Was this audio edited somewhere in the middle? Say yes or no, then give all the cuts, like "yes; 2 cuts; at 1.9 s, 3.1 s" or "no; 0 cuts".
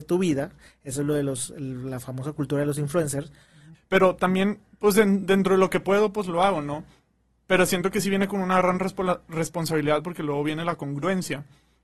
yes; 1 cut; at 3.7 s